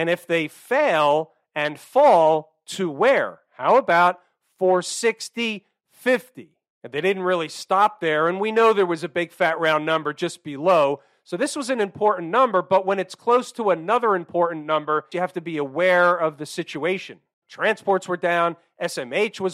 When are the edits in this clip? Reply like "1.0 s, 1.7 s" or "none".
15.1 s, 17.4 s